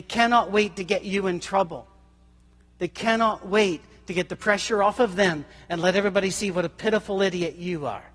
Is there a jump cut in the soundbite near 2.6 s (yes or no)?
no